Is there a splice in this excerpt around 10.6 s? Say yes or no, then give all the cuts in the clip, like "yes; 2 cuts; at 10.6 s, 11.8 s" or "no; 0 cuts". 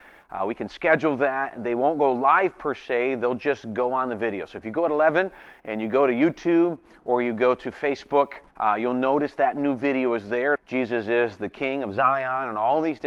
yes; 2 cuts; at 8.5 s, 10.6 s